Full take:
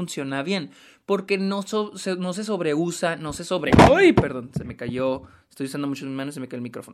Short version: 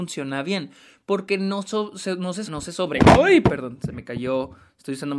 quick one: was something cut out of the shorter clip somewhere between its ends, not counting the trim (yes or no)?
yes